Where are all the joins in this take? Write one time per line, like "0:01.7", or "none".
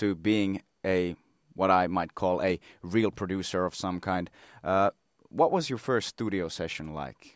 none